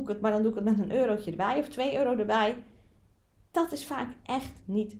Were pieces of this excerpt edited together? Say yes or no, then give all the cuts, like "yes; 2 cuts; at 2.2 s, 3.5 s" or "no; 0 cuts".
no; 0 cuts